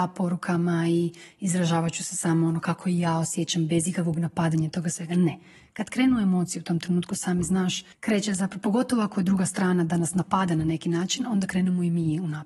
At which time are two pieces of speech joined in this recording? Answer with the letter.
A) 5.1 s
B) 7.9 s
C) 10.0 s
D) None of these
B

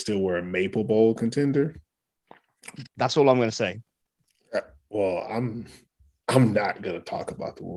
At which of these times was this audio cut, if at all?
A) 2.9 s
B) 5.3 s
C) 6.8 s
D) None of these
A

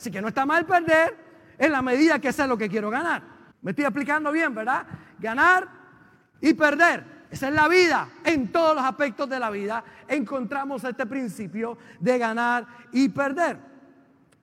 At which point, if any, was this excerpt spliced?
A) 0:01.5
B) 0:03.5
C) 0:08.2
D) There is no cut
B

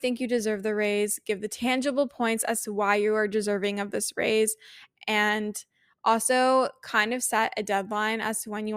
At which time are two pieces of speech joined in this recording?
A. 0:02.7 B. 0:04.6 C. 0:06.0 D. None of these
D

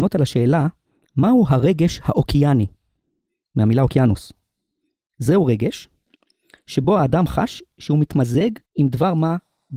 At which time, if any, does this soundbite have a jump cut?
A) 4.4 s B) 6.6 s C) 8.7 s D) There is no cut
C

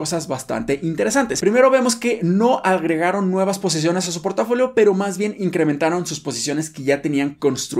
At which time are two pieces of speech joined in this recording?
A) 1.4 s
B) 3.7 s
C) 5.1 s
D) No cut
D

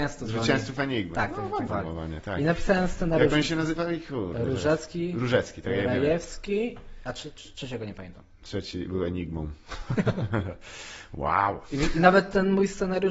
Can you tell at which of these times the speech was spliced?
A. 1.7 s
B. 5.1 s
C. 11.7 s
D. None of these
A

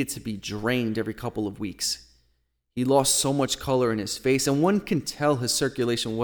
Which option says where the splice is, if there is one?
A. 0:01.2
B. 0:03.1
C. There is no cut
C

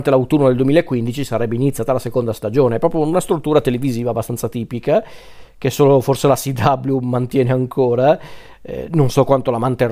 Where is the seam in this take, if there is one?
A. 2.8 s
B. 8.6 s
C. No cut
C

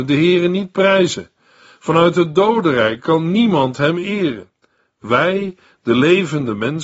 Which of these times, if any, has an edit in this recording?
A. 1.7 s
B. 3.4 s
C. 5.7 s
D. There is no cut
D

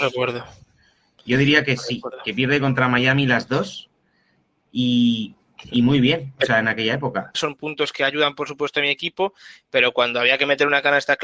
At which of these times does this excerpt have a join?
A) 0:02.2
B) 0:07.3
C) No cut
B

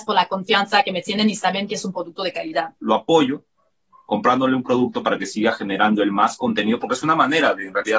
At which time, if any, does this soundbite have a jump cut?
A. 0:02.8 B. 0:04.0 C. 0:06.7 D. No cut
A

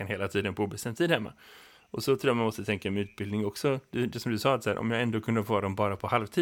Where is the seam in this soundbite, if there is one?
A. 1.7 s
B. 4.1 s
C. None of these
C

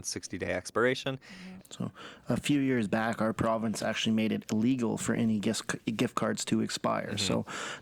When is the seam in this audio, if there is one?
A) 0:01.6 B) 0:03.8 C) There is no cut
A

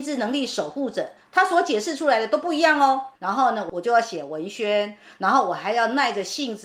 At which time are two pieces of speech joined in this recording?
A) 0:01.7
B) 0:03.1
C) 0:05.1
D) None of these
B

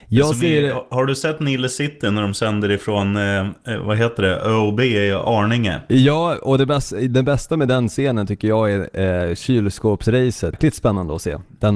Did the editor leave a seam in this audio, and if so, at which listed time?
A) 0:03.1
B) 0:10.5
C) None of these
B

